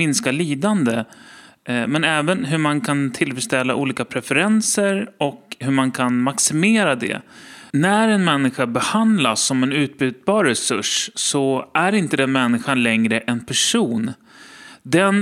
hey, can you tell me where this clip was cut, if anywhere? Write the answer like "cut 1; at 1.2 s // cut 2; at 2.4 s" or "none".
cut 1; at 7.7 s

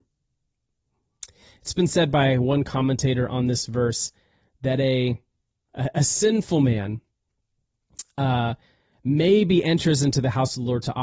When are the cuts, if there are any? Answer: cut 1; at 5.7 s

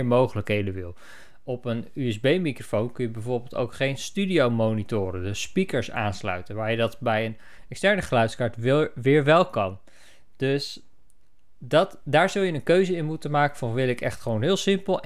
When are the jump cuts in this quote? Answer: none

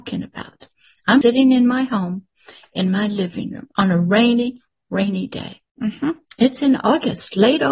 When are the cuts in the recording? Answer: cut 1; at 1.2 s // cut 2; at 5.7 s

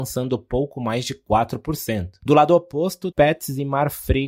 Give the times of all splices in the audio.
cut 1; at 3.1 s

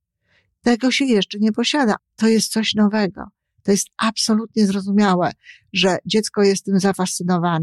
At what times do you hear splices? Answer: cut 1; at 2.0 s

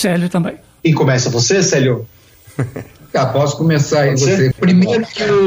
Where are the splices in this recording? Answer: cut 1; at 4.5 s

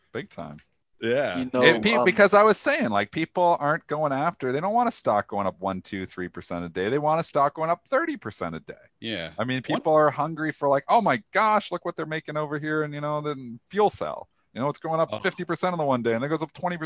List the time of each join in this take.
none

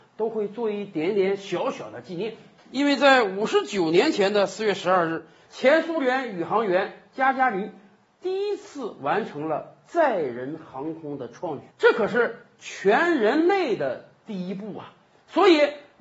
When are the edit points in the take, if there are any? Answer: cut 1; at 2.6 s // cut 2; at 11.7 s

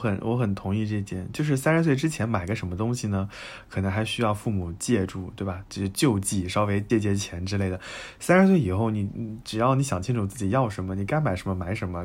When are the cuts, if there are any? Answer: cut 1; at 6.9 s

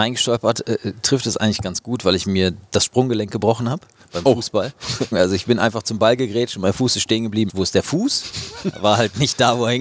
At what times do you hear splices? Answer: cut 1; at 5.1 s // cut 2; at 7.5 s

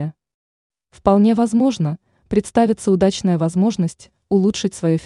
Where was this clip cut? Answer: none

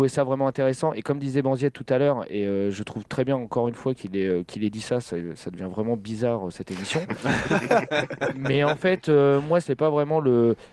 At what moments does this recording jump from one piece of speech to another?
cut 1; at 9.6 s

